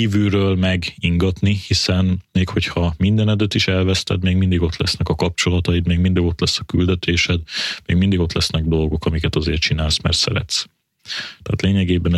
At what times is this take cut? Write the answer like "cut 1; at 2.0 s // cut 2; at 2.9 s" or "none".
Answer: none